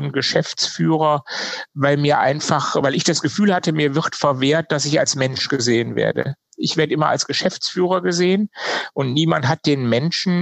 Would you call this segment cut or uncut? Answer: uncut